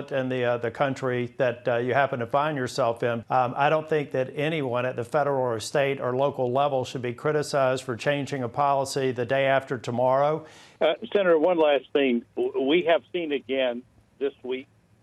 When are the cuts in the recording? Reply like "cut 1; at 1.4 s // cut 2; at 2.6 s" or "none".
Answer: cut 1; at 3.2 s // cut 2; at 10.8 s